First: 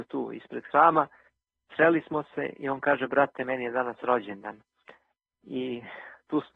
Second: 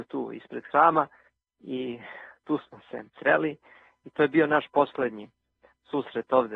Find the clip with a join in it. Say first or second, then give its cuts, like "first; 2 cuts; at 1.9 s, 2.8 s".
second; 2 cuts; at 1.5 s, 3.1 s